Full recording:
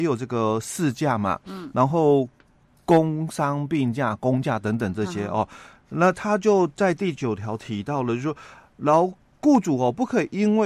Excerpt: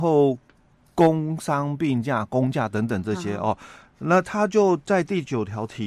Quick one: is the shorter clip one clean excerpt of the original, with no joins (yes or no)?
yes